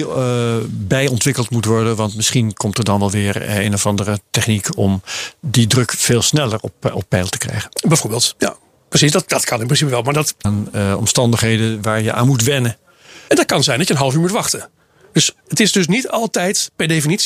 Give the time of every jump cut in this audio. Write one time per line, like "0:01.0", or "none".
0:10.4
0:13.3